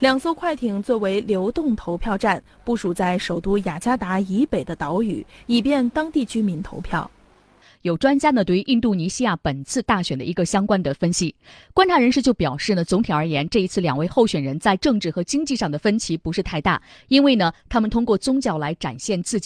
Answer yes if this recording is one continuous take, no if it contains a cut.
yes